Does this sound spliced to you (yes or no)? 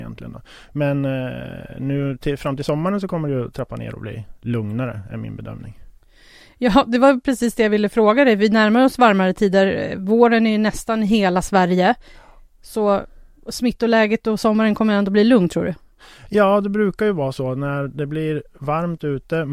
no